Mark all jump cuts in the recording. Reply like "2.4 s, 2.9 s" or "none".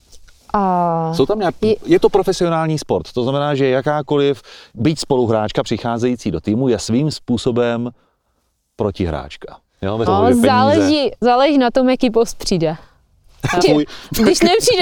10.1 s, 13.6 s

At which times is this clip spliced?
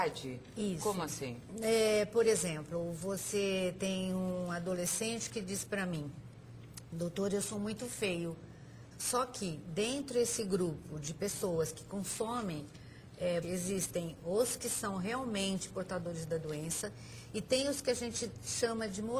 8.9 s, 13.4 s

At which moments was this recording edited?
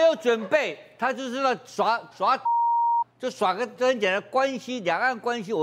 2.1 s, 3.8 s

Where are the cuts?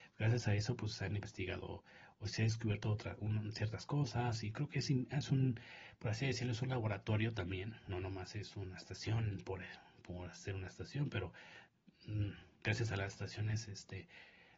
12.5 s

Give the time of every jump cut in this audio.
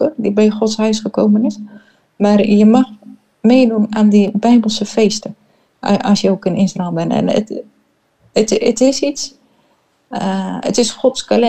none

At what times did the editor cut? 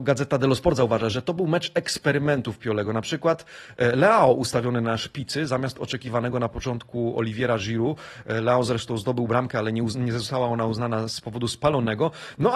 1.1 s

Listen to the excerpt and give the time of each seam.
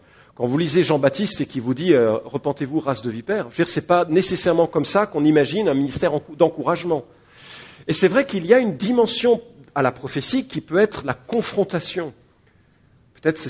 none

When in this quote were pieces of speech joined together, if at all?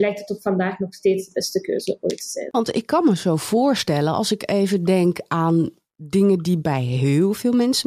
2.5 s

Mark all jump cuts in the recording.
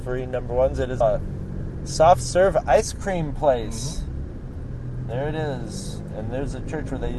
1.0 s

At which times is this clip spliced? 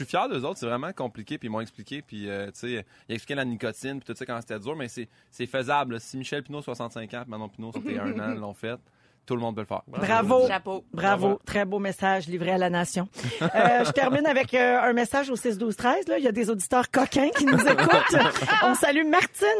7.7 s

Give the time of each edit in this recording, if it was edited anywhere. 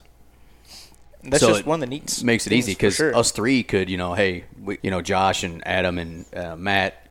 4.8 s

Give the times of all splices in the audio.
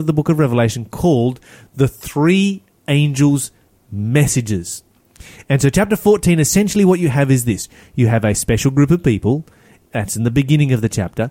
none

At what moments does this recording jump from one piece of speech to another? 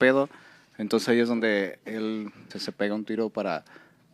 2.5 s

